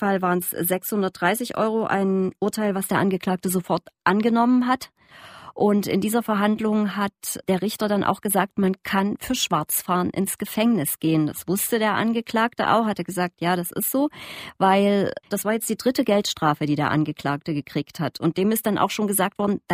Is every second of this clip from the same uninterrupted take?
no; 1 cut; at 15.3 s

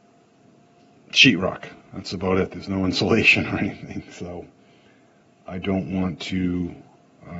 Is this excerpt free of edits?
yes; 0 cuts

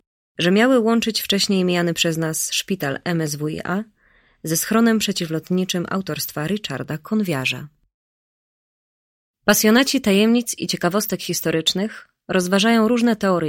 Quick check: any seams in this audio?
no; 0 cuts

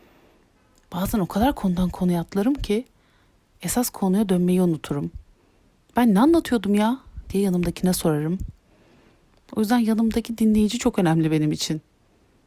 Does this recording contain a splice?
no; 0 cuts

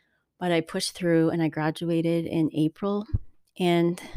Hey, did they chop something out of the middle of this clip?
no; 0 cuts

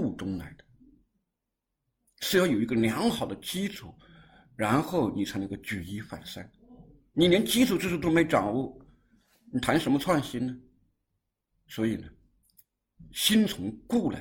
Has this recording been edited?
no; 0 cuts

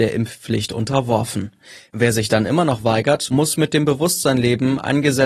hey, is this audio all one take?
yes; 0 cuts

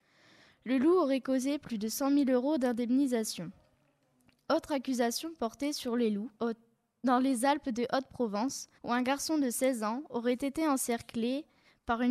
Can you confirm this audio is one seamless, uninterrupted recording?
no; 2 cuts; at 6.4 s, 8.8 s

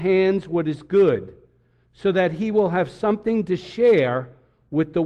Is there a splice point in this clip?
no; 0 cuts

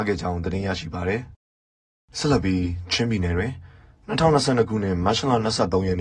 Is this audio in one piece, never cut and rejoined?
yes; 0 cuts

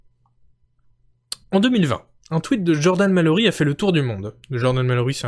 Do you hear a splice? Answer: no; 0 cuts

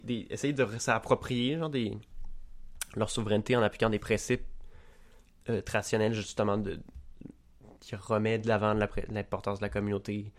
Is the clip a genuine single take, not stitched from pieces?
yes; 0 cuts

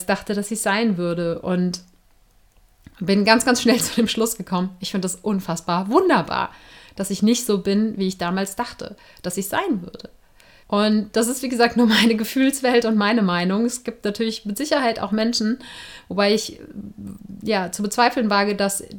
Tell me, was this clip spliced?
yes; 1 cut; at 10.6 s

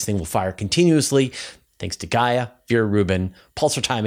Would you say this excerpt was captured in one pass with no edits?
no; 1 cut; at 1.7 s

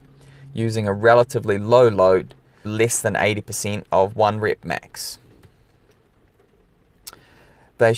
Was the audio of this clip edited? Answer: yes; 1 cut; at 2.6 s

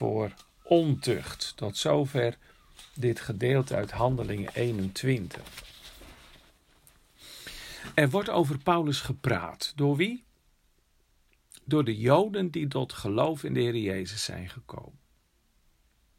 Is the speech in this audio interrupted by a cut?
no; 0 cuts

